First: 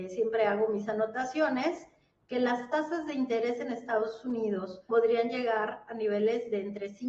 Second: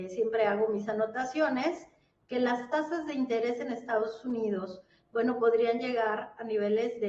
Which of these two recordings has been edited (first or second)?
first